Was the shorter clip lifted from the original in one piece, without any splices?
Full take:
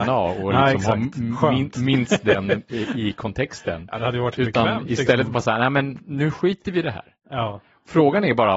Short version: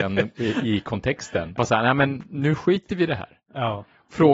no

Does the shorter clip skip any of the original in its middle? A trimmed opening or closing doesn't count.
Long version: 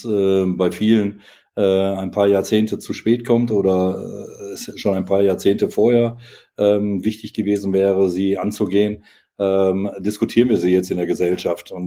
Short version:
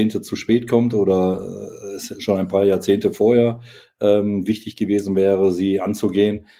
no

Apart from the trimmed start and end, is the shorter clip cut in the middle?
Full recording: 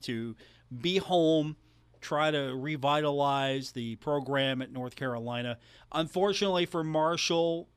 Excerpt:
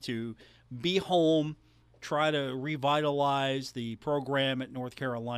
no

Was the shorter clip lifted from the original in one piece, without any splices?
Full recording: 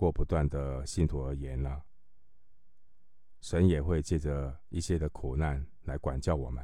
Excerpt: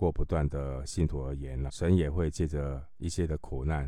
no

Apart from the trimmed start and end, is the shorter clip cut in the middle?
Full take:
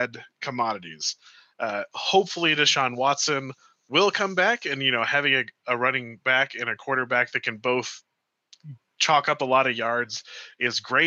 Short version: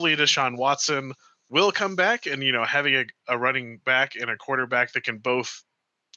no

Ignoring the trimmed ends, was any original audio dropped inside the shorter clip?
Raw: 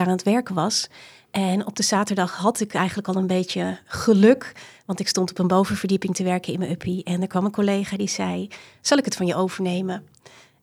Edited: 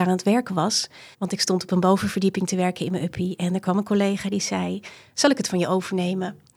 yes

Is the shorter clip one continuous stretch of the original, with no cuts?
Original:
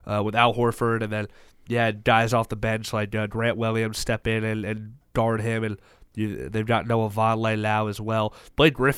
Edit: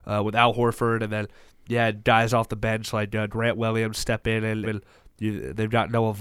no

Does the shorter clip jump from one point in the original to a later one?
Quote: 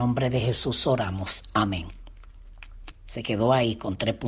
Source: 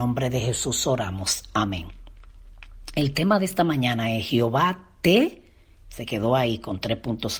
yes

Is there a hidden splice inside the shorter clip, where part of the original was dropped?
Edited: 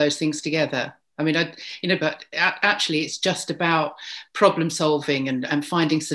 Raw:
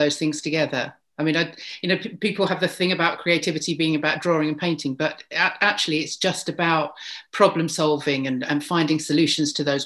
yes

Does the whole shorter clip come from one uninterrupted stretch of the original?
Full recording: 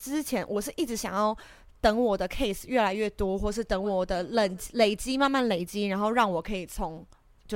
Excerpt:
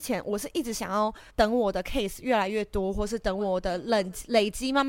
no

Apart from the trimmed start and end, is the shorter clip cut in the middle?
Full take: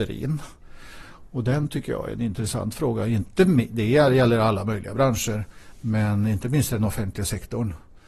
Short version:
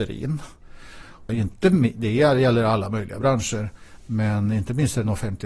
yes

